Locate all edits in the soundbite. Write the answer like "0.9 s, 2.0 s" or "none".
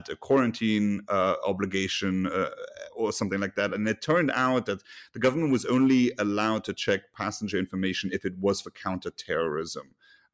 none